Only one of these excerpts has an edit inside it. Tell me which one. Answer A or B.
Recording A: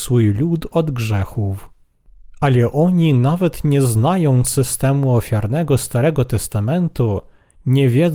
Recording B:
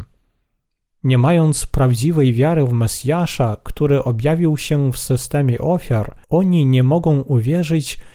B